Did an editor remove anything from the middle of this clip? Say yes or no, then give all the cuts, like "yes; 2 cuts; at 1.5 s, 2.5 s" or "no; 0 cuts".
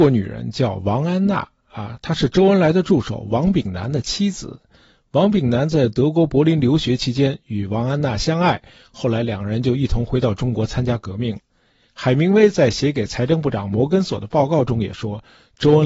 yes; 1 cut; at 11.5 s